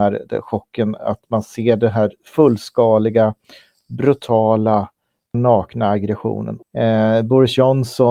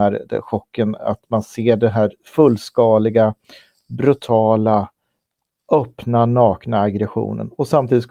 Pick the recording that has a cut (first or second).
first